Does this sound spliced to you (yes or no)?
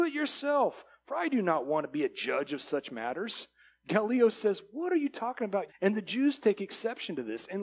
yes